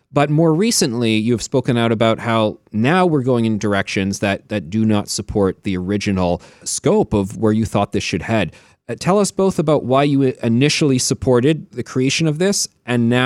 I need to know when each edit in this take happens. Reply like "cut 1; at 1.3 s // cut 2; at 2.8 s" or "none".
cut 1; at 6.6 s // cut 2; at 11.7 s